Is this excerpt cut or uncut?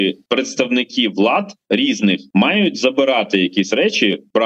uncut